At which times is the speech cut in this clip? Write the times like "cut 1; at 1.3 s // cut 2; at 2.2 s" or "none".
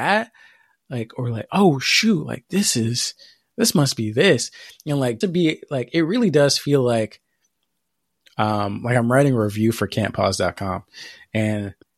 cut 1; at 5.2 s